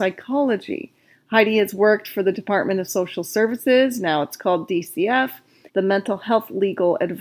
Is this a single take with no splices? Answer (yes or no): no